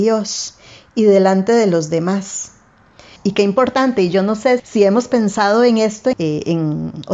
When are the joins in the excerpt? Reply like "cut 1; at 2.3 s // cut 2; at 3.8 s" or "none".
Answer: cut 1; at 3.2 s // cut 2; at 4.6 s // cut 3; at 6.1 s